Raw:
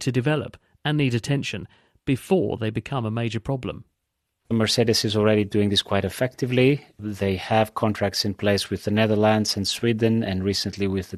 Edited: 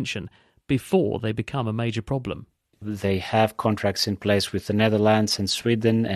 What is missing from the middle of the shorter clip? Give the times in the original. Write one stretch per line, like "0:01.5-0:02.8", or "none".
0:04.1-0:06.9